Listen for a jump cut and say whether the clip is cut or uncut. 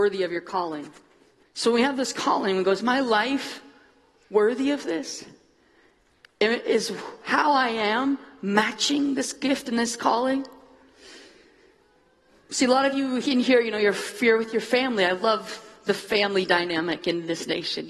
cut